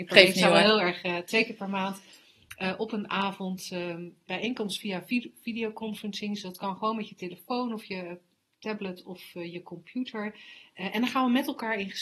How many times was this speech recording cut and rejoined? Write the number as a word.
one